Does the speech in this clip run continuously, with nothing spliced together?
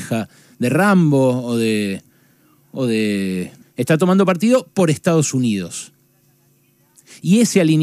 no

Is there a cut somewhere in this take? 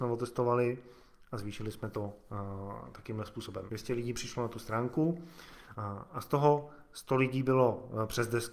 yes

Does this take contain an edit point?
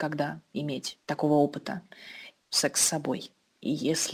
yes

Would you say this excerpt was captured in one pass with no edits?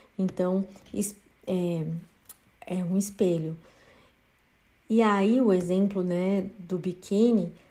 yes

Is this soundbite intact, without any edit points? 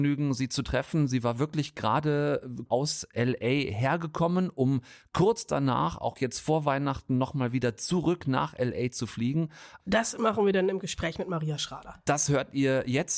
no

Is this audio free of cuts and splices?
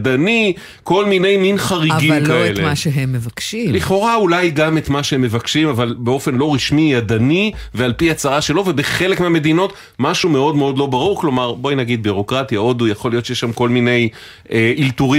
yes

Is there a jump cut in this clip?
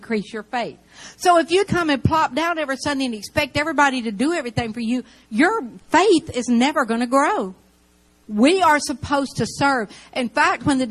yes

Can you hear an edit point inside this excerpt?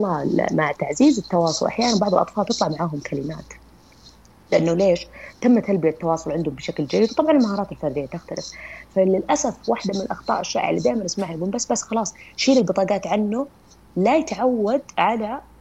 no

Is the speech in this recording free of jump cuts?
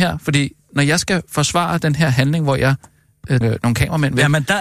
no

